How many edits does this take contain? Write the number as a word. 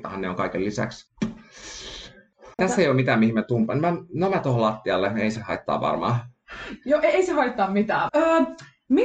two